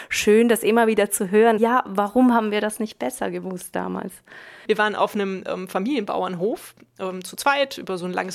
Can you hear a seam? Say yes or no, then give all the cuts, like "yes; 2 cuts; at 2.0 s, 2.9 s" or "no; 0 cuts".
yes; 2 cuts; at 1.6 s, 4.6 s